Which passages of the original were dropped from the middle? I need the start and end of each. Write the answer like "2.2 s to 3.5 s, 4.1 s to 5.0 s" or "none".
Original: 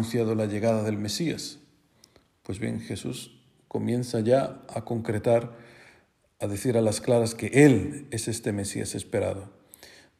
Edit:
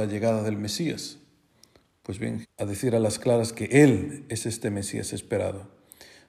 2.8 s to 6.2 s

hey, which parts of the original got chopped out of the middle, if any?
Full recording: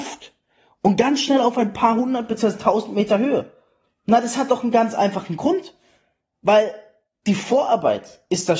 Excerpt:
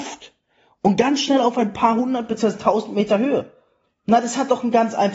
none

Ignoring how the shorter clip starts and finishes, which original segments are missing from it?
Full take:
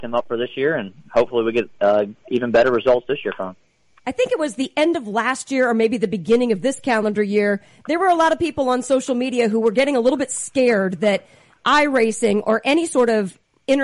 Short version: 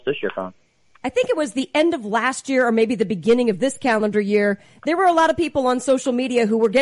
none

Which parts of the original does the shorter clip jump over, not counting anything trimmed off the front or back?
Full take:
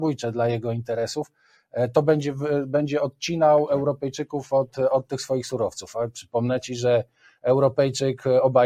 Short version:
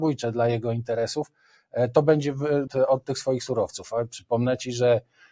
2.7 s to 4.7 s

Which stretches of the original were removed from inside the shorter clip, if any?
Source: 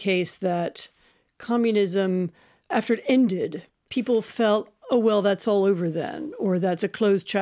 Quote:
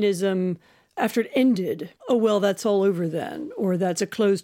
3.7 s to 4.8 s

